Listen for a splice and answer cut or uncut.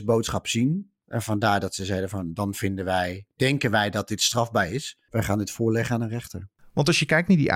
uncut